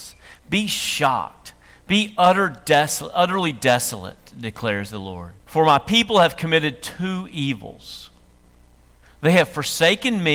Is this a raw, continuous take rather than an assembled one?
no; 1 cut; at 5.4 s

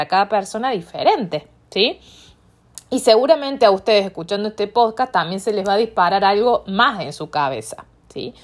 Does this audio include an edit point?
no; 0 cuts

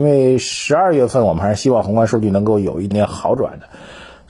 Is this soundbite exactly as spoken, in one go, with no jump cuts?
no; 1 cut; at 2.9 s

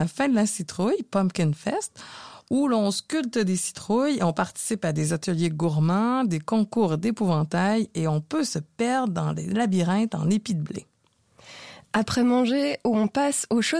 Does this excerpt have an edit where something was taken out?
no; 0 cuts

